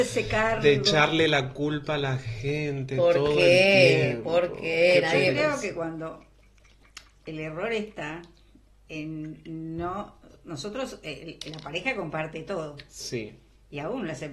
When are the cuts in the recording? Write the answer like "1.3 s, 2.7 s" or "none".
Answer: none